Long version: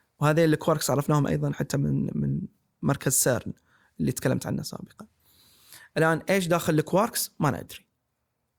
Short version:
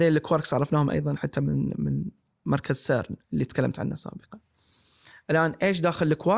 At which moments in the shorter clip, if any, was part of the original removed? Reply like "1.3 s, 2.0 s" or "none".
3.2 s